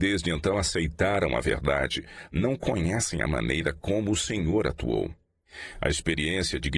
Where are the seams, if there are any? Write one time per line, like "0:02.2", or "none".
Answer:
none